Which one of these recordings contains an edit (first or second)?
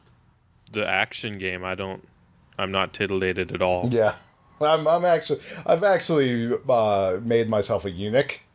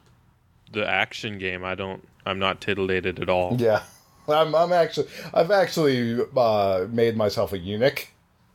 second